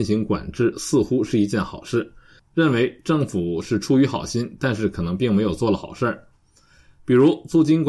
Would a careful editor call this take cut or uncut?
cut